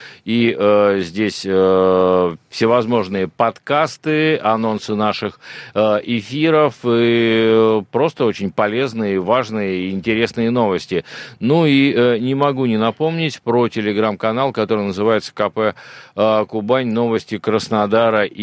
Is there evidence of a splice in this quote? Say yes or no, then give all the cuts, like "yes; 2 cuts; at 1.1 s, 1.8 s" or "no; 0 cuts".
no; 0 cuts